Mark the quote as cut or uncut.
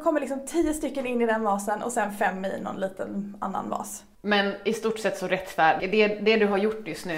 cut